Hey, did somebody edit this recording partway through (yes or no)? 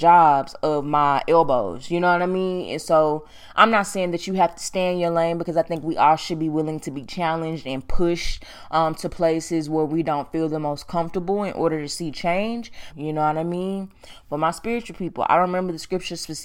yes